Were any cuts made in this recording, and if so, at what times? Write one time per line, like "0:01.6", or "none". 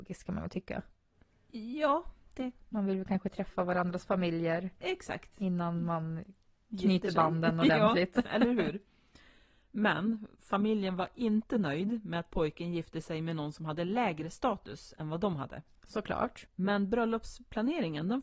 0:16.5